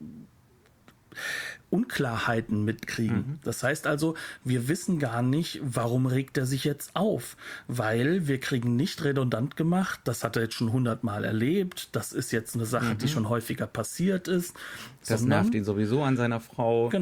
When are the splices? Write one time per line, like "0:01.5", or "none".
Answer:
none